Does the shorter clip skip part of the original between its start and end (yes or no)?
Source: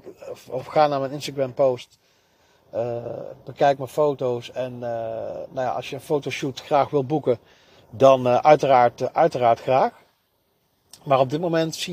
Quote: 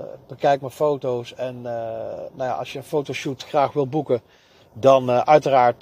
no